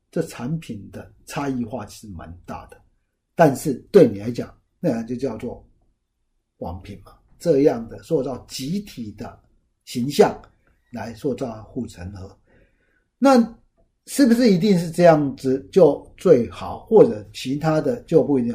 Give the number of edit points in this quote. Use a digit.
1